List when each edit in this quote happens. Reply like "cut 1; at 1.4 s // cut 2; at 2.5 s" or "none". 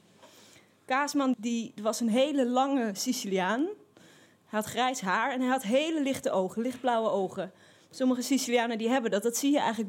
cut 1; at 1.3 s